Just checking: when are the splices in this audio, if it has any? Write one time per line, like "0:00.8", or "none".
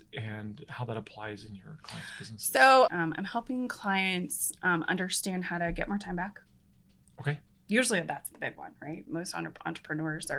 0:02.9